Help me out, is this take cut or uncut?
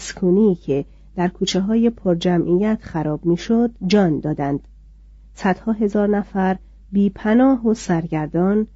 cut